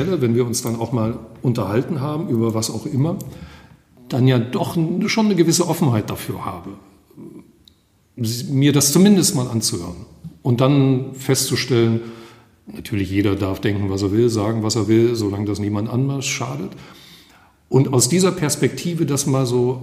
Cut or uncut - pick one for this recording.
uncut